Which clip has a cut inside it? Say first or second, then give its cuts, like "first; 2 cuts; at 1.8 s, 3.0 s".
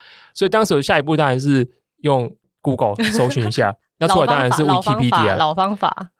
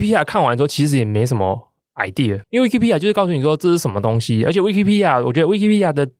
second; 1 cut; at 2.4 s